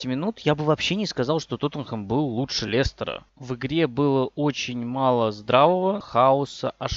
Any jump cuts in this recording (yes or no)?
yes